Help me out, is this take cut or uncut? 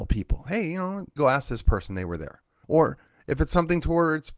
cut